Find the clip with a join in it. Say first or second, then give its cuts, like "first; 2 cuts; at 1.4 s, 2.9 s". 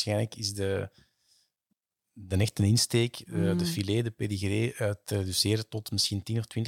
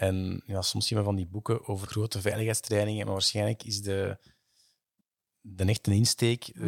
second; 1 cut; at 1.9 s